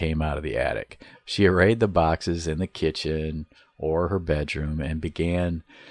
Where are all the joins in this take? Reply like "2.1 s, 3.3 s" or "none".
1.1 s